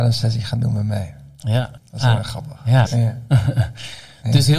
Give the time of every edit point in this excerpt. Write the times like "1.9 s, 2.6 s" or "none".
1.8 s, 2.9 s